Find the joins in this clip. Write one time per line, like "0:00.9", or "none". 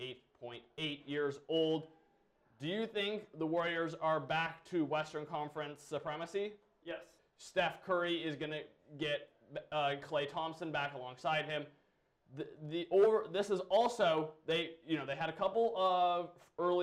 0:07.2